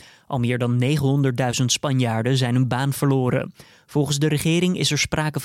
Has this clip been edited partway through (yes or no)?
no